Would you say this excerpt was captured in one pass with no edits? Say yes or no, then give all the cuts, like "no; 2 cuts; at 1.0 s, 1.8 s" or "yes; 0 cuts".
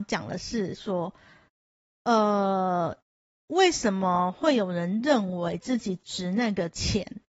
yes; 0 cuts